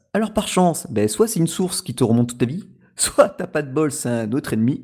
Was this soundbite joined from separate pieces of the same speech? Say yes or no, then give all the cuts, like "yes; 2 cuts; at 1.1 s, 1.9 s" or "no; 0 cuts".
no; 0 cuts